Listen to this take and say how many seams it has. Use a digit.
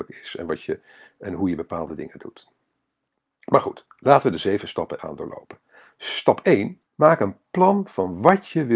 2